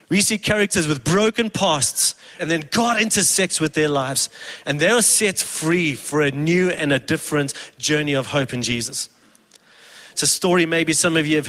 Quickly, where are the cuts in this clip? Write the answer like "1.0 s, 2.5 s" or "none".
2.4 s, 4.6 s, 10.1 s